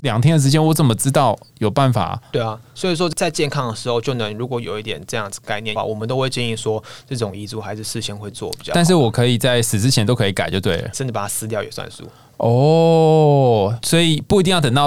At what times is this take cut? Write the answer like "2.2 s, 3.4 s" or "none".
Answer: 5.8 s, 10.9 s